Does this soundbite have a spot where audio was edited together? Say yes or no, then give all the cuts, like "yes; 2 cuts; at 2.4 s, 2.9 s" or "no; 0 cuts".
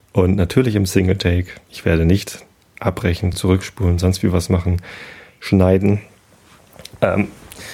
no; 0 cuts